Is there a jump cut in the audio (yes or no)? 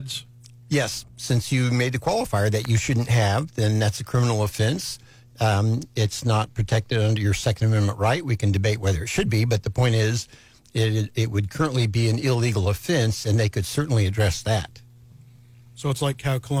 no